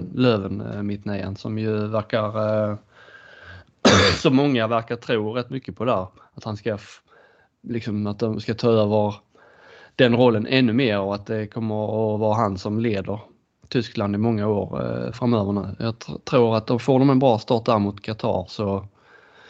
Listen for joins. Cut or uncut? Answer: uncut